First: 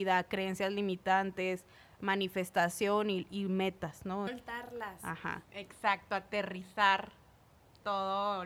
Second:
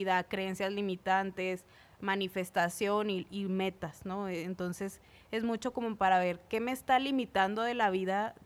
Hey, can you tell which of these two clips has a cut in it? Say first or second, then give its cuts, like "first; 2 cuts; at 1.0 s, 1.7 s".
first; 2 cuts; at 4.3 s, 5.4 s